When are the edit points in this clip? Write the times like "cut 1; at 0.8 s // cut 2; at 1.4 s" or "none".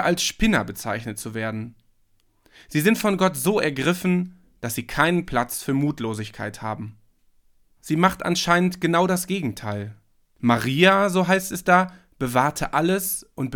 cut 1; at 7.8 s